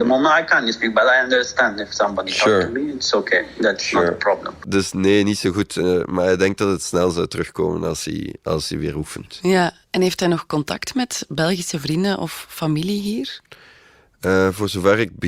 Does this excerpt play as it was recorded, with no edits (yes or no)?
yes